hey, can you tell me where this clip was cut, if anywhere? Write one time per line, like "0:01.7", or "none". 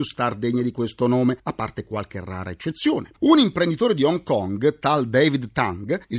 0:03.1